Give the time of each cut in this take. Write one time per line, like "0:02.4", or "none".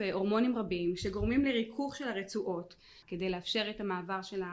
0:03.0